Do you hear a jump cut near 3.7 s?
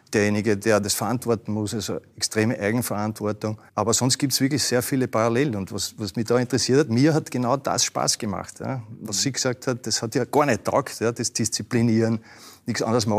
yes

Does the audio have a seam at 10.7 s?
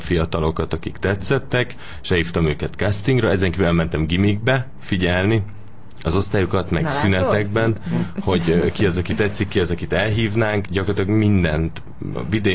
yes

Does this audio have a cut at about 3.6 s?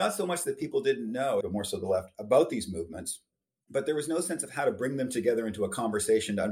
no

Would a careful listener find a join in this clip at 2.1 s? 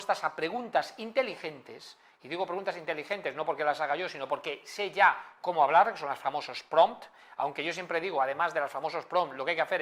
no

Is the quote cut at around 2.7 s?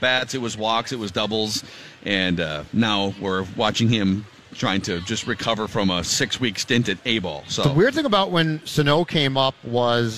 no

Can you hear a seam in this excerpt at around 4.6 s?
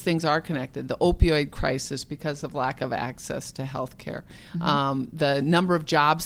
no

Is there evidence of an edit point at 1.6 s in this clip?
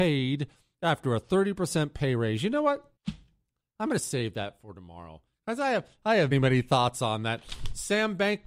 no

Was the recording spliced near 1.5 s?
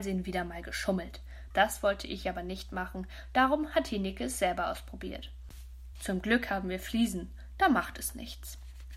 yes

